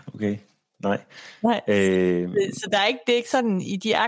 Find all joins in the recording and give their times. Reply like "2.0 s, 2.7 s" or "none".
none